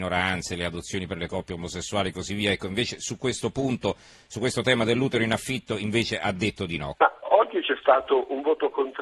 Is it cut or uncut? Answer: cut